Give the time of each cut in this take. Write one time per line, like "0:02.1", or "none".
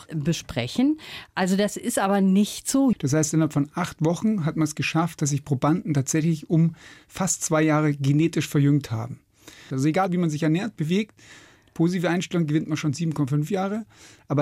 0:02.9
0:09.7